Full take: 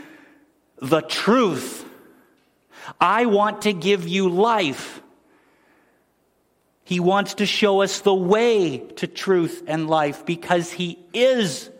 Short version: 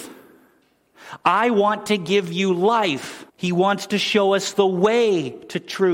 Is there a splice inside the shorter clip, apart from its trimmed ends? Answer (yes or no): yes